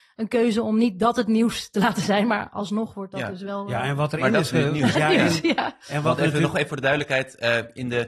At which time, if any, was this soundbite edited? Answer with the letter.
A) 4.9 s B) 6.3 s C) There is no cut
A